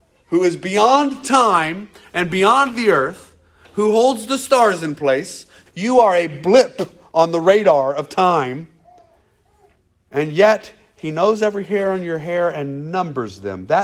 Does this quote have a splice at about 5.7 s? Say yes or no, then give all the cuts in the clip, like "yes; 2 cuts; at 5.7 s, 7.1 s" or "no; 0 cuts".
yes; 1 cut; at 5.7 s